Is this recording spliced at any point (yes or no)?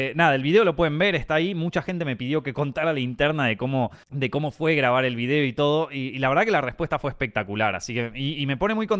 yes